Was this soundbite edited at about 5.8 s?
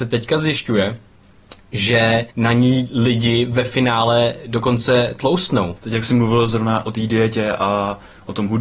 yes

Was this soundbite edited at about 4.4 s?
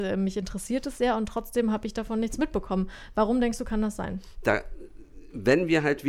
yes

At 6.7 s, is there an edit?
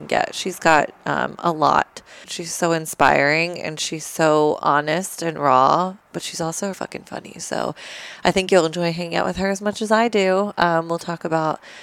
yes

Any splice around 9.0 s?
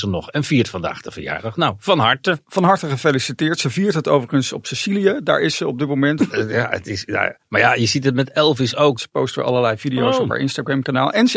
yes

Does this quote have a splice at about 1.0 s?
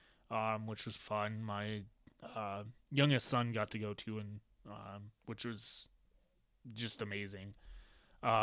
yes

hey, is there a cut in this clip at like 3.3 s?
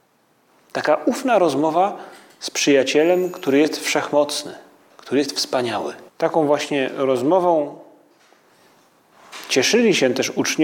no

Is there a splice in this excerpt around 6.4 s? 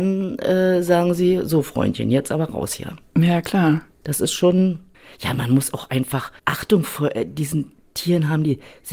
yes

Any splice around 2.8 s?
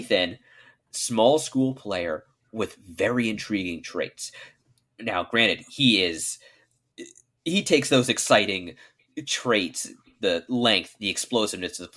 no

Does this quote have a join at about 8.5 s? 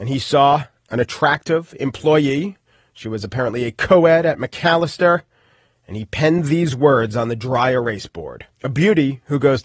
yes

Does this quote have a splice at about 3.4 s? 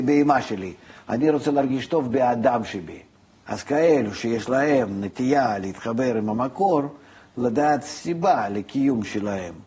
yes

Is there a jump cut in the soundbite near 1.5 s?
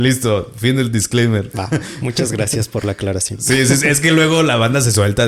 yes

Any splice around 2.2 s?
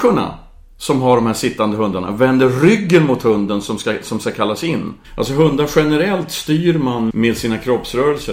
no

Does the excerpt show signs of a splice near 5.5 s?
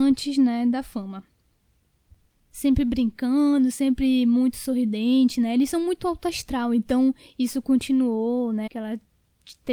no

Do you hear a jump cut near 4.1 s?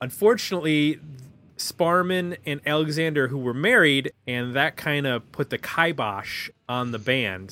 yes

